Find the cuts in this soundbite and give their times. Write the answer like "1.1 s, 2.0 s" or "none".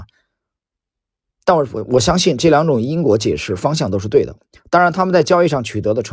none